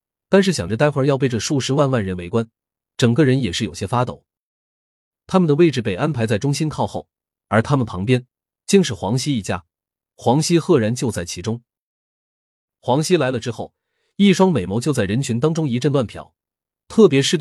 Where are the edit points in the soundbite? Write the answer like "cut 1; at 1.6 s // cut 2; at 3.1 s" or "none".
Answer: cut 1; at 5.1 s

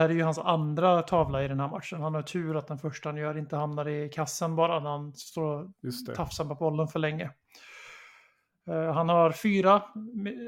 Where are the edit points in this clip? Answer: none

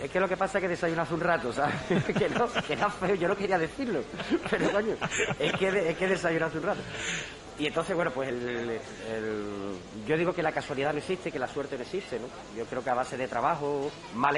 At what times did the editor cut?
none

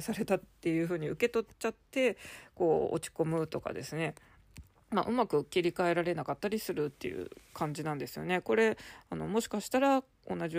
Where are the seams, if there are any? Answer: none

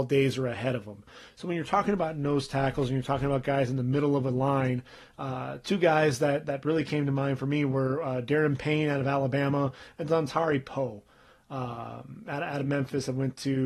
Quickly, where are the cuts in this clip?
none

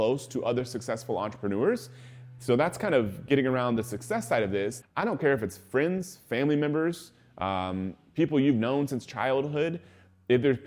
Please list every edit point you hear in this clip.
cut 1; at 4.8 s

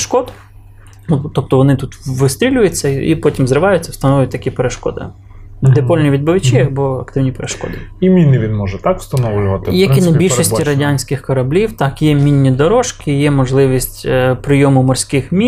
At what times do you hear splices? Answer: none

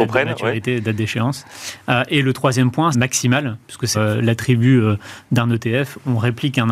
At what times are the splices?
cut 1; at 2.9 s // cut 2; at 3.9 s

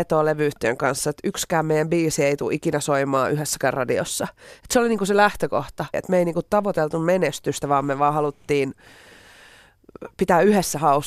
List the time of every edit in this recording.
cut 1; at 5.9 s // cut 2; at 7.6 s

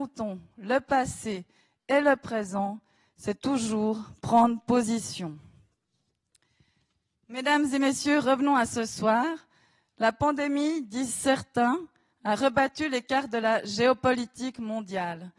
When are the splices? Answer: cut 1; at 3.1 s

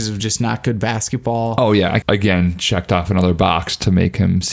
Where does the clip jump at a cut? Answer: cut 1; at 2.0 s

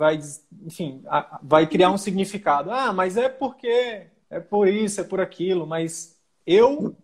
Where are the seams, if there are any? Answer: none

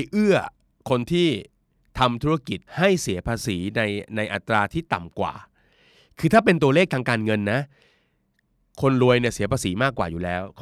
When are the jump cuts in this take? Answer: cut 1; at 2.7 s

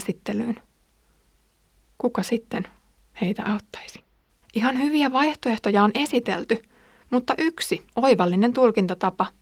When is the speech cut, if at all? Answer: cut 1; at 4.4 s

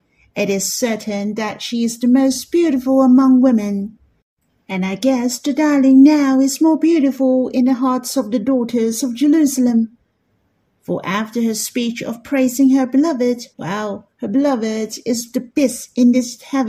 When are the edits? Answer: cut 1; at 13.5 s

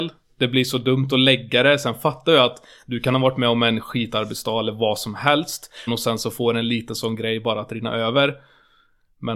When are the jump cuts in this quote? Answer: cut 1; at 5.9 s

